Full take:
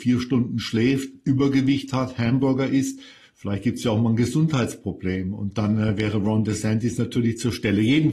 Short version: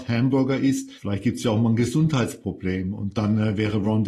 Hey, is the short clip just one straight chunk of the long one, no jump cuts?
no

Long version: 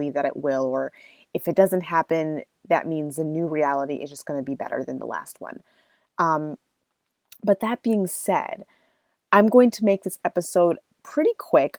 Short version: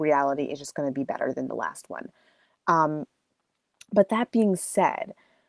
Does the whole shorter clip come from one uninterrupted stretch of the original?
yes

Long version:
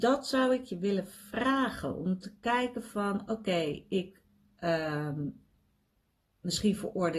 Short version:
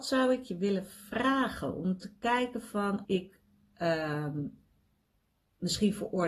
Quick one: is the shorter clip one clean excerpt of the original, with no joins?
no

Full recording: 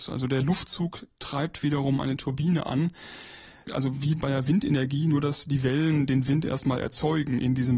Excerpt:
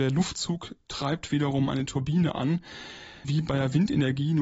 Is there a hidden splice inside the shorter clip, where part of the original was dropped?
yes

